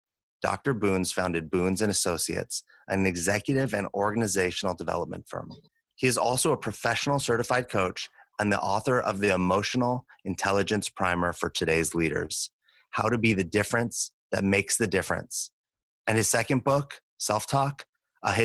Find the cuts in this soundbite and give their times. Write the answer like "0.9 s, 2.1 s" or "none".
none